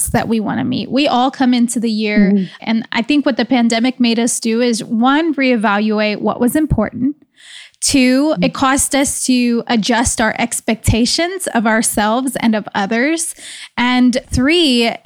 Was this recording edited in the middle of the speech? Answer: yes; 1 cut; at 2.6 s

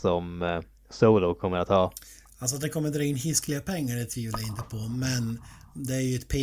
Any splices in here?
no; 0 cuts

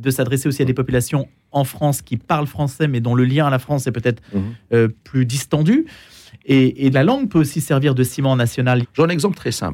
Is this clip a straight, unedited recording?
no; 2 cuts; at 6.9 s, 8.8 s

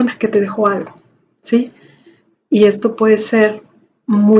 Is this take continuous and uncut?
no; 1 cut; at 2.3 s

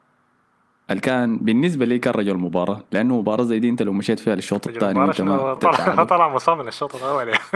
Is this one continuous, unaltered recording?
no; 1 cut; at 5.6 s

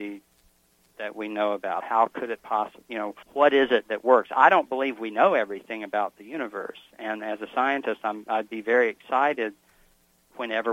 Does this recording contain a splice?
yes; 2 cuts; at 1.8 s, 3.2 s

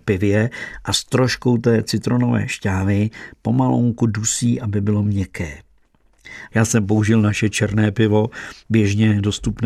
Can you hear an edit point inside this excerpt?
yes; 1 cut; at 6.5 s

